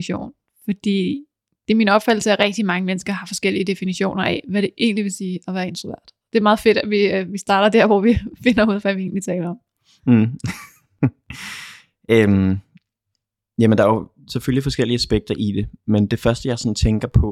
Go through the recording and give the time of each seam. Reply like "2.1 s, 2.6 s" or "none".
none